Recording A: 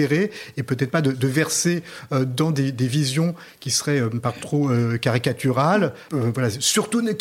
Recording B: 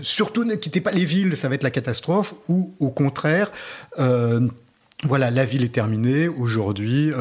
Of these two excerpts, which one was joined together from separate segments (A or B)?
A